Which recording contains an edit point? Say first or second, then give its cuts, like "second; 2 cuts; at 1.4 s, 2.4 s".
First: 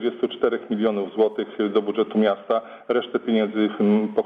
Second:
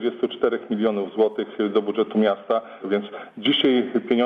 second; 1 cut; at 2.8 s